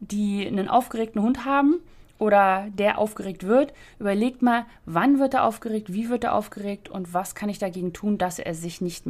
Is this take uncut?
yes; 0 cuts

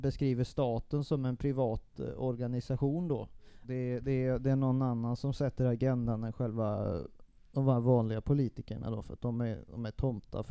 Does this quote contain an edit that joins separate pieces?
yes; 1 cut; at 3.6 s

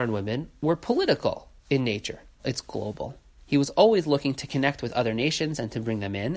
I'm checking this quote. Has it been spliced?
yes; 1 cut; at 2.4 s

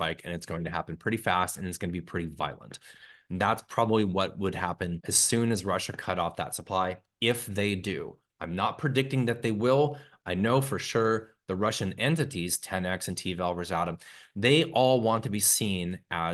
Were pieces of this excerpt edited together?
no; 0 cuts

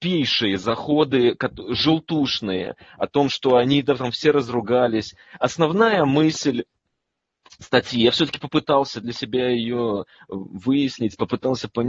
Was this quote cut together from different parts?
no; 0 cuts

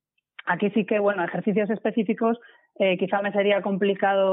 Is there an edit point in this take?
no; 0 cuts

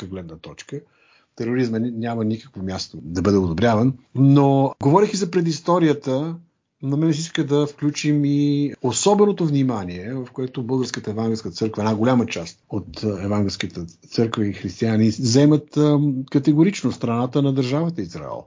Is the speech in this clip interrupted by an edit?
no; 0 cuts

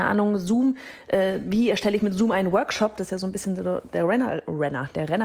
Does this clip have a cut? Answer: no; 0 cuts

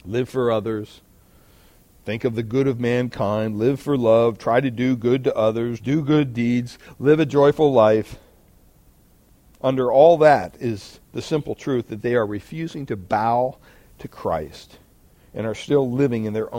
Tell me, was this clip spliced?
yes; 1 cut; at 5.8 s

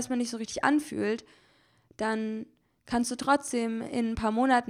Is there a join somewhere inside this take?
no; 0 cuts

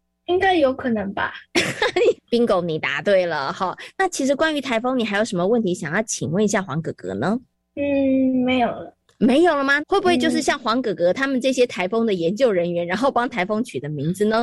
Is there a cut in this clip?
yes; 2 cuts; at 2.1 s, 9.8 s

